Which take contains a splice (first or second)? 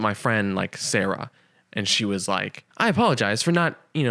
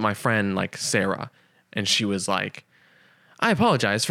first